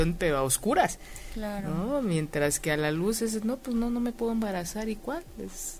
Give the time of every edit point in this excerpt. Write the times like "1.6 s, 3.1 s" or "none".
none